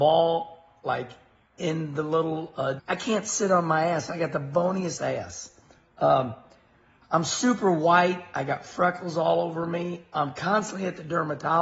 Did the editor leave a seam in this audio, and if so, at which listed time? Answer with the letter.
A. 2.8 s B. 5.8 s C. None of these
A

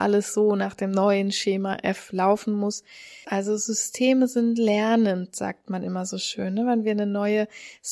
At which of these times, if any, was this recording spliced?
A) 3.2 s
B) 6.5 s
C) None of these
A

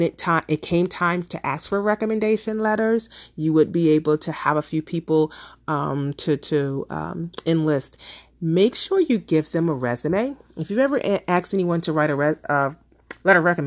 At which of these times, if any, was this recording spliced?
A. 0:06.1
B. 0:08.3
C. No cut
C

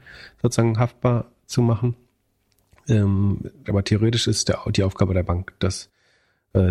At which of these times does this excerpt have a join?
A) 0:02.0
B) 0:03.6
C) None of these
B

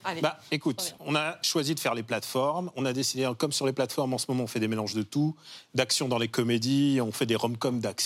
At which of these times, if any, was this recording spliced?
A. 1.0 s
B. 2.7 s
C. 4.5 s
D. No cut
A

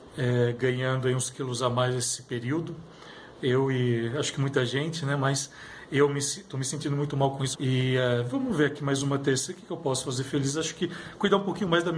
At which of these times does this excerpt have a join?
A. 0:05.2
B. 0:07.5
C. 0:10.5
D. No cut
B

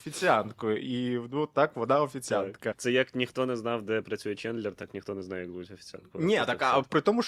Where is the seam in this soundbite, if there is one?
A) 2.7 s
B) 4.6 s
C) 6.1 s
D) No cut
A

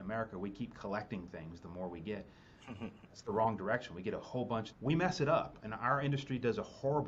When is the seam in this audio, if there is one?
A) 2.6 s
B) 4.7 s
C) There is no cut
B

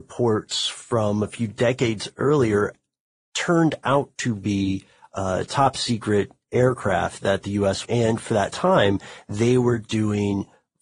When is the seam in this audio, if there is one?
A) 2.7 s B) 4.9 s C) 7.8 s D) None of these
C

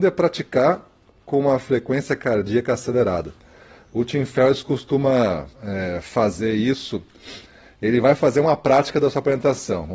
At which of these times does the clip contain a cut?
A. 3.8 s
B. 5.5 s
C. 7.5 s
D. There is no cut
B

